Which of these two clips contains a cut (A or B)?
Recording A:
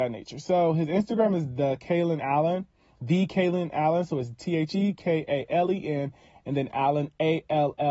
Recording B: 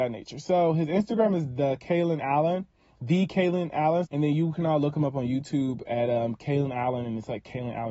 B